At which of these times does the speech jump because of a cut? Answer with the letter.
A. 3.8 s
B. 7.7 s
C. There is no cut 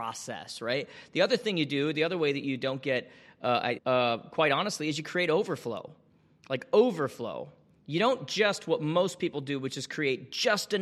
A